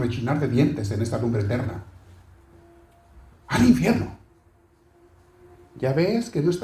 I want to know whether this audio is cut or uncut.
uncut